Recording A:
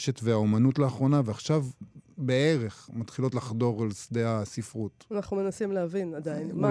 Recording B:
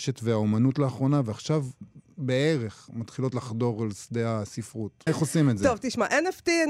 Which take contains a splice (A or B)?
B